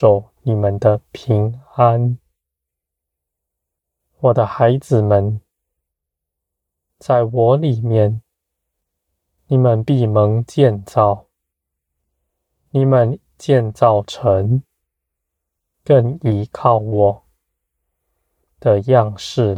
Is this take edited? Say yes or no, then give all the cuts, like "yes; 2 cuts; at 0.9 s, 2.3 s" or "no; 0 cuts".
no; 0 cuts